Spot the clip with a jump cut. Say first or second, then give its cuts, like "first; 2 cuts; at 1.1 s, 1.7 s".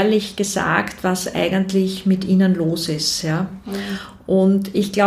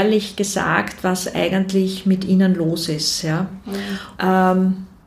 second; 1 cut; at 4.2 s